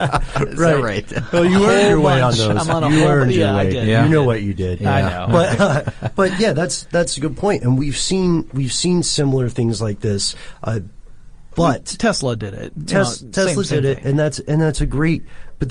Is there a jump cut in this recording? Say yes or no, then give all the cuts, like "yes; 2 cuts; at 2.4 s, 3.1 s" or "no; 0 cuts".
no; 0 cuts